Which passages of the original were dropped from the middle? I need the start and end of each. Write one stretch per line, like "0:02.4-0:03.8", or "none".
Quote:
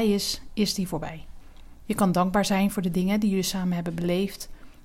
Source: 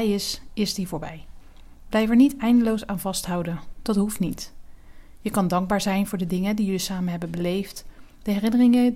0:01.8-0:05.2